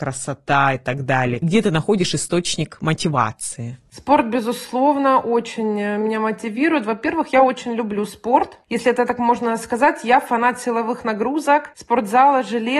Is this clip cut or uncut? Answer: uncut